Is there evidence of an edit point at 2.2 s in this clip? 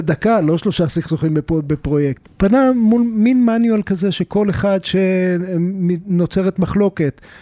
yes; 1 cut; at 2.2 s

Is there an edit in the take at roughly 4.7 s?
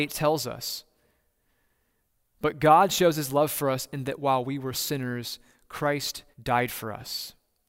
yes; 2 cuts; at 4.7 s, 6.3 s

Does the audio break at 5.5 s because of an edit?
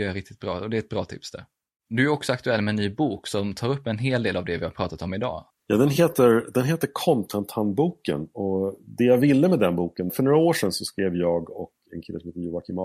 yes; 2 cuts; at 5.5 s, 10.1 s

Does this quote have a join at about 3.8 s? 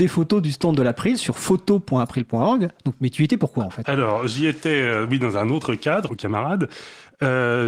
yes; 2 cuts; at 3.8 s, 6.1 s

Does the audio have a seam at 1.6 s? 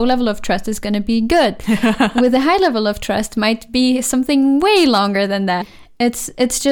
no; 1 cut; at 5.6 s

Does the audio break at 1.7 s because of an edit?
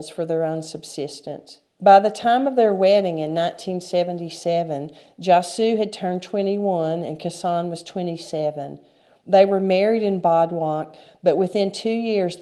yes; 1 cut; at 1.7 s

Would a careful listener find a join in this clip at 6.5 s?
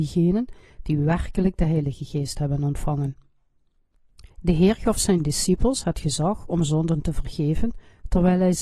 no; 1 cut; at 4.3 s

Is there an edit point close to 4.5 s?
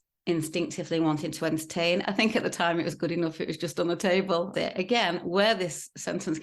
yes; 2 cuts; at 2.0 s, 4.5 s

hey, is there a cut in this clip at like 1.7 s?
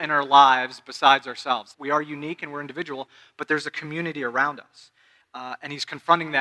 yes; 2 cuts; at 1.7 s, 5.2 s

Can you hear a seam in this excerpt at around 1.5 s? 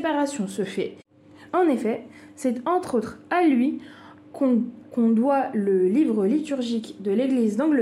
yes; 1 cut; at 1.5 s

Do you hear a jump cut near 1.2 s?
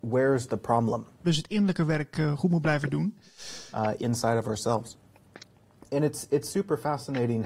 yes; 2 cuts; at 1.2 s, 3.7 s

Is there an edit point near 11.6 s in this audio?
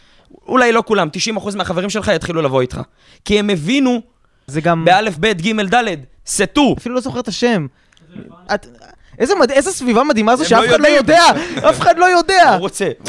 no; 3 cuts; at 4.5 s, 6.8 s, 8.5 s

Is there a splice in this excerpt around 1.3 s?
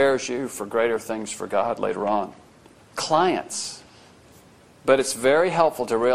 no; 2 cuts; at 2.8 s, 4.6 s

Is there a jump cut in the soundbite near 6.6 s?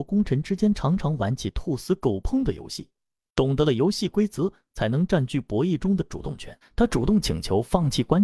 yes; 1 cut; at 6.6 s

